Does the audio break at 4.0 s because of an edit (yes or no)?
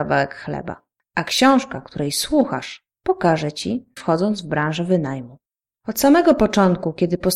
yes